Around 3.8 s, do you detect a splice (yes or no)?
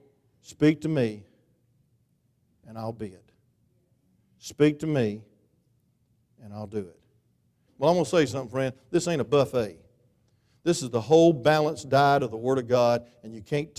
no